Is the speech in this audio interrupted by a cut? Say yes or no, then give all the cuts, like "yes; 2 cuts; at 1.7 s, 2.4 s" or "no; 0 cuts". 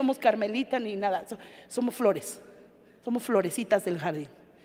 no; 0 cuts